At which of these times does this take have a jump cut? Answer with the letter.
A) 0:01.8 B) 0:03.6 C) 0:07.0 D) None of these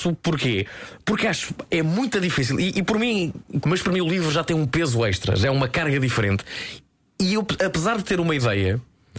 B